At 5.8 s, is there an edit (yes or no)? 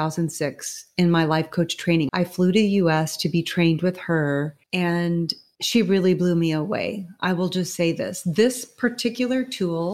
no